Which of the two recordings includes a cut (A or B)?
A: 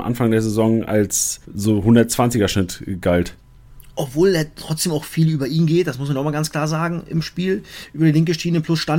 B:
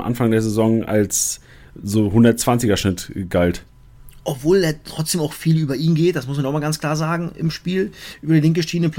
A